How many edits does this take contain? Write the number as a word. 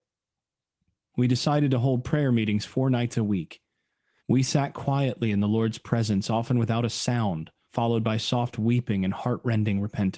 two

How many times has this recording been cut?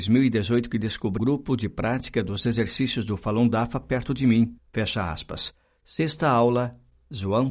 two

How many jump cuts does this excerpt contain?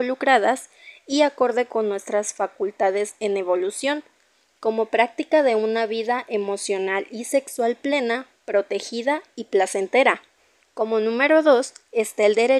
one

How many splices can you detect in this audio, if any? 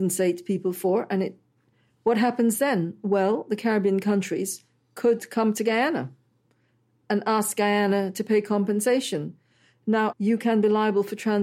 one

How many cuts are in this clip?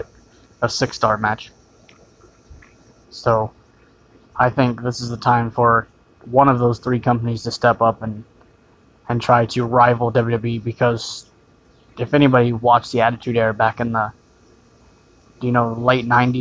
one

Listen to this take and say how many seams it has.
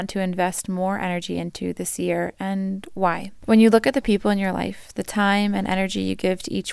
one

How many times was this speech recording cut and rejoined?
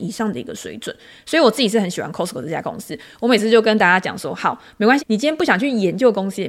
one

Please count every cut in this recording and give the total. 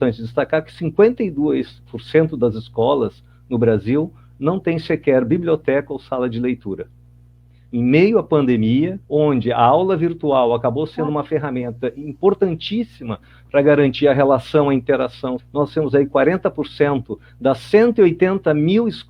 three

